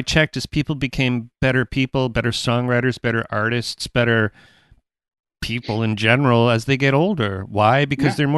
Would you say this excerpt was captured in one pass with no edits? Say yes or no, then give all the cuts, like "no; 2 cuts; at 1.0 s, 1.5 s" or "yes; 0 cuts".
yes; 0 cuts